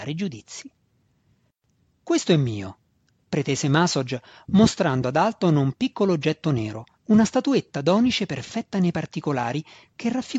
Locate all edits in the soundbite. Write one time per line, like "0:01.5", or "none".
0:06.9